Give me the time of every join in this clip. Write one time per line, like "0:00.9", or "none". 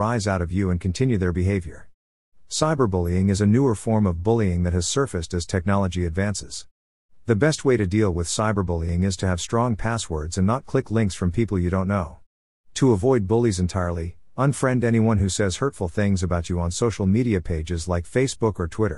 none